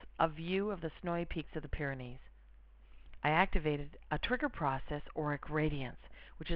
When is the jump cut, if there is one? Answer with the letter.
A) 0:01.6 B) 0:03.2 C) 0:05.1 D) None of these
B